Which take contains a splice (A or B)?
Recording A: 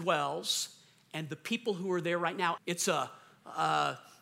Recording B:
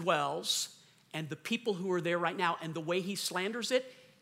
A